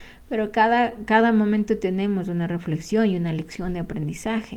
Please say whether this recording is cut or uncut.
uncut